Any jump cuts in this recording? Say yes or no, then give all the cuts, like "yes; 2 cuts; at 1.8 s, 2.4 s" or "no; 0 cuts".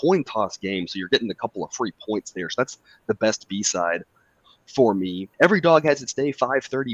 yes; 1 cut; at 5.3 s